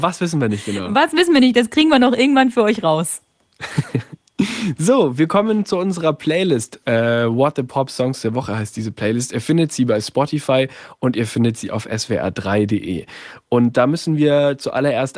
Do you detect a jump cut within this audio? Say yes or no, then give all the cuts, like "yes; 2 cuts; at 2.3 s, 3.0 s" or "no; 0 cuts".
no; 0 cuts